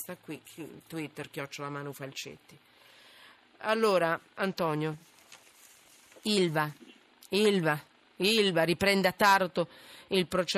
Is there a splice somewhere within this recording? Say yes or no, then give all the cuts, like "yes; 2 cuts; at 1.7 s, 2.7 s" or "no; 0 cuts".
no; 0 cuts